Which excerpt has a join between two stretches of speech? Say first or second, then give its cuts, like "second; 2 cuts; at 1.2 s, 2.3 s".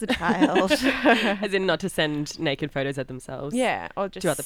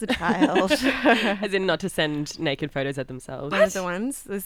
second; 1 cut; at 3.5 s